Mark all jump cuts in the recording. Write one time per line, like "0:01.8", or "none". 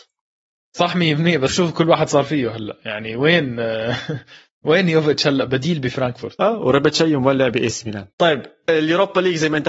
0:01.5
0:08.1